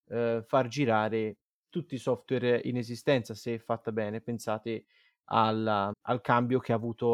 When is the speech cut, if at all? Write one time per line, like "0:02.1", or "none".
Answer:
0:05.9